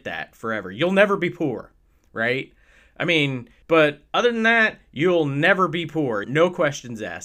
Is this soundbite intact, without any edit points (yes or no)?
no